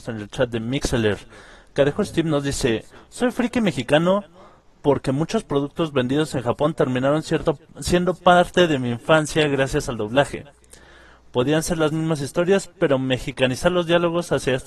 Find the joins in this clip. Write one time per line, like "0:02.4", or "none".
none